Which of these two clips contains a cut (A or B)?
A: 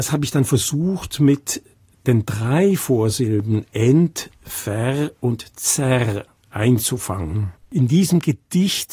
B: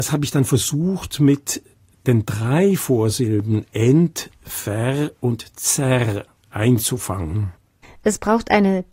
A